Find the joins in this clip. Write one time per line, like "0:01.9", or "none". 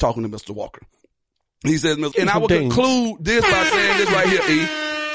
0:02.1